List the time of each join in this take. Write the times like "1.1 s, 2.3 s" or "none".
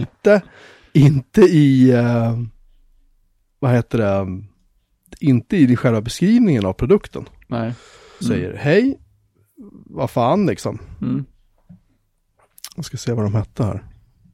8.2 s